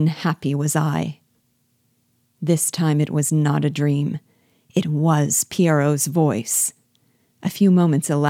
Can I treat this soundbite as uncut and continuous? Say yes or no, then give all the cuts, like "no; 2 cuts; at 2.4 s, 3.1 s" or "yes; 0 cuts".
yes; 0 cuts